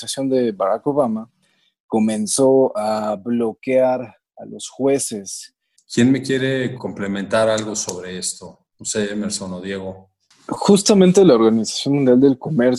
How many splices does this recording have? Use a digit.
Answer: 1